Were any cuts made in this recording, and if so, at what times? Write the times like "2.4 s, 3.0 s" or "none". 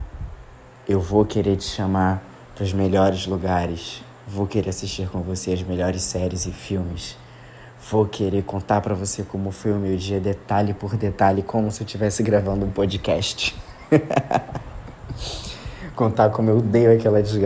none